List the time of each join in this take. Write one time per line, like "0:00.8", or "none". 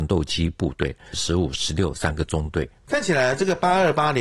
0:01.1